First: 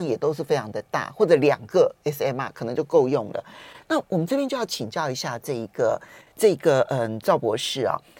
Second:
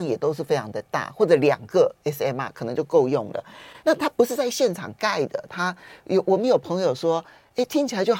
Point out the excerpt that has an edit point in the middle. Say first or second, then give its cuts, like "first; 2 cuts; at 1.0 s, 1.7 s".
first; 1 cut; at 3.8 s